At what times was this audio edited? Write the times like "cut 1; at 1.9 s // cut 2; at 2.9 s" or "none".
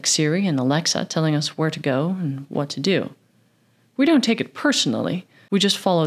none